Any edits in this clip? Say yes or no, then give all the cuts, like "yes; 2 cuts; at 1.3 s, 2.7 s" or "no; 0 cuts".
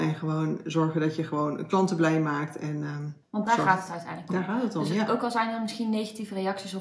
yes; 1 cut; at 3.2 s